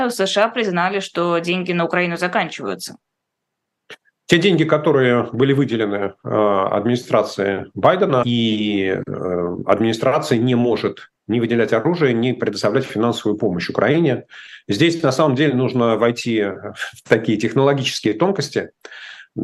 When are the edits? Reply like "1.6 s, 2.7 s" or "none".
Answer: 8.2 s, 11.2 s